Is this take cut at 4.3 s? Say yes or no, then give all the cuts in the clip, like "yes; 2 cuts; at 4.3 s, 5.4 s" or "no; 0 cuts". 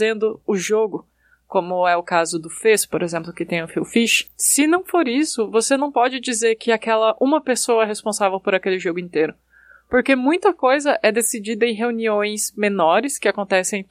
yes; 1 cut; at 4.3 s